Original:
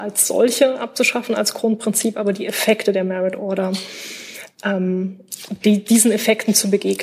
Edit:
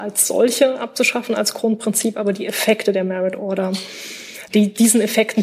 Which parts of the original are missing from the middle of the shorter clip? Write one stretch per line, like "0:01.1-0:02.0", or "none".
0:04.5-0:05.6